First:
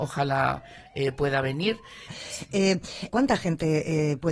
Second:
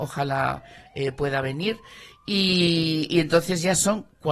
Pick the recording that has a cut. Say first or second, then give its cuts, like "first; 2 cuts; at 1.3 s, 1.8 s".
first; 2 cuts; at 2.1 s, 3.1 s